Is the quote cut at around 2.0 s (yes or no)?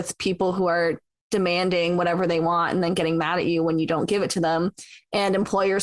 no